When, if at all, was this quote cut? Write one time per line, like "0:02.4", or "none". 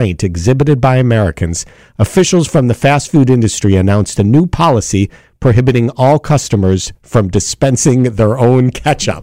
none

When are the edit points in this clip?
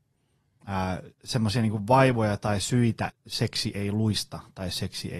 0:01.1
0:03.1

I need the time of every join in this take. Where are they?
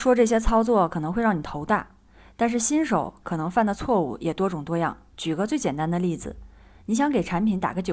none

